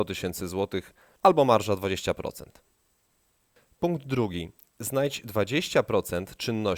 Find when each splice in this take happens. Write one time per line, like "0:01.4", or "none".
none

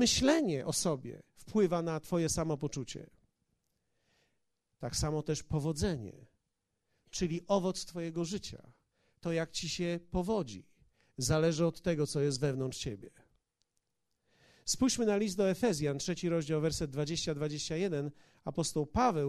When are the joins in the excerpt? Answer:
none

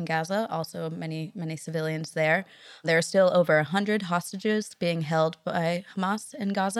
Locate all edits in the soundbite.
none

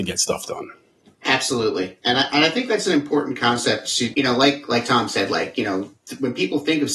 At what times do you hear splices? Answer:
0:04.1

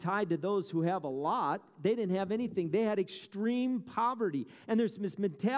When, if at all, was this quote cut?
0:01.7

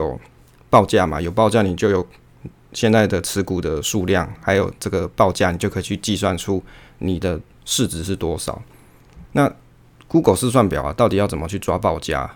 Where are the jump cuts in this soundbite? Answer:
0:09.3

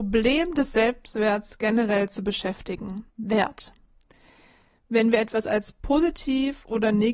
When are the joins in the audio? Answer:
0:03.1

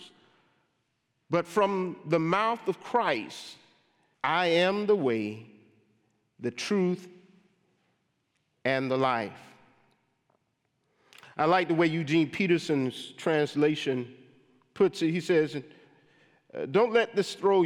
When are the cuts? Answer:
0:04.1

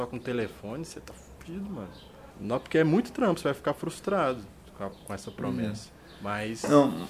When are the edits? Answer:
0:02.3
0:04.9

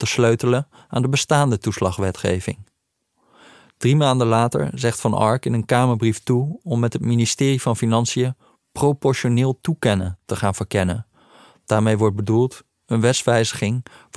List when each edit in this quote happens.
none

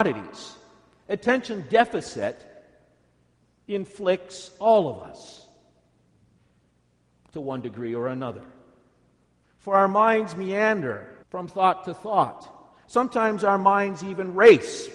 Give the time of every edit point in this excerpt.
0:01.0
0:09.4
0:11.2

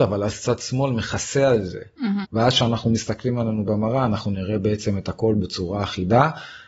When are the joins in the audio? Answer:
0:02.2

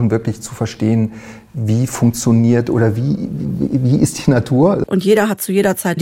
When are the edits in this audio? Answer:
0:04.9

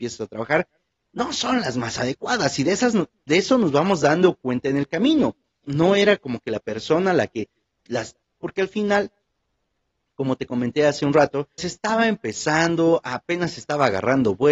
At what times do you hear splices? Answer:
0:05.6
0:08.2
0:11.6

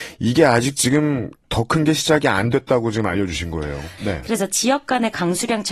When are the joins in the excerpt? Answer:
0:04.0

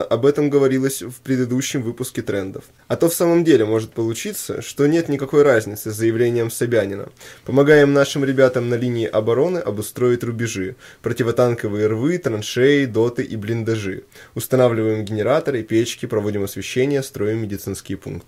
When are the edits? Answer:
none

